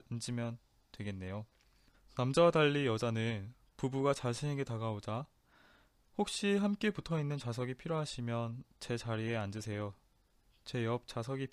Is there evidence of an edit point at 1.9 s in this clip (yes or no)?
yes